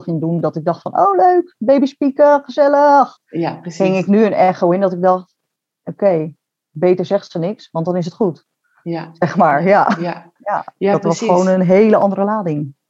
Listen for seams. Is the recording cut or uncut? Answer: cut